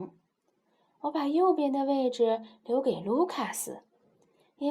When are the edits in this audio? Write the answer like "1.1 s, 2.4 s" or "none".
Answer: none